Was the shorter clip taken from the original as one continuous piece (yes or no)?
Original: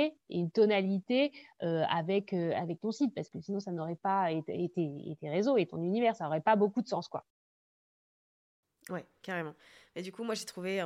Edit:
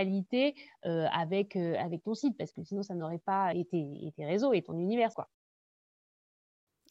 no